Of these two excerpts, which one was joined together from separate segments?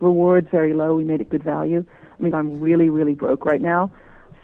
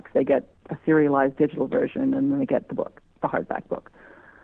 first; 1 cut; at 2.3 s

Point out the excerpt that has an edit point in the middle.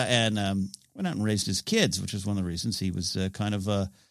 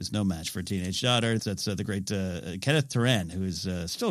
second; 1 cut; at 1.4 s

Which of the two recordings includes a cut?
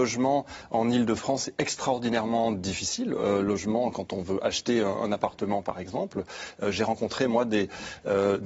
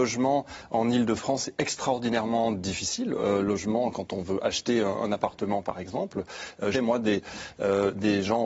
second; 1 cut; at 6.7 s

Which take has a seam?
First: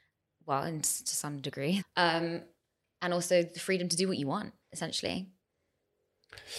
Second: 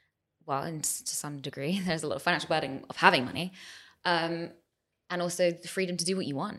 first; 2 cuts; at 1.8 s, 4.6 s

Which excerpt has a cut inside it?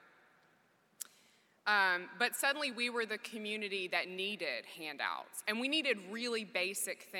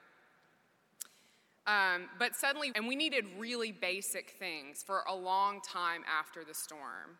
second; 1 cut; at 2.7 s

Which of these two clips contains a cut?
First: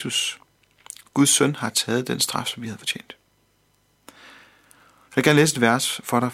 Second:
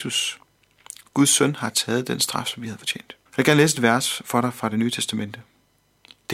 second; 1 cut; at 3.3 s

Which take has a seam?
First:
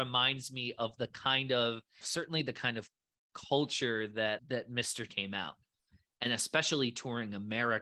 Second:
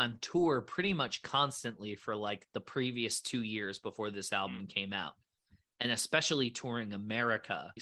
first; 2 cuts; at 2.0 s, 5.1 s

